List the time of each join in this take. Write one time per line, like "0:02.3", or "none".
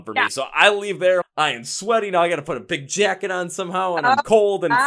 0:01.2